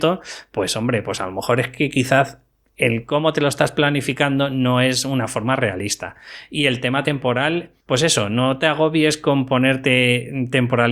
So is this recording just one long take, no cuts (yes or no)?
yes